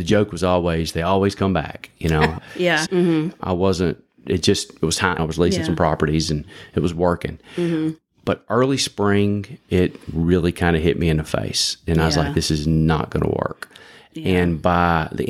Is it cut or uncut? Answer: cut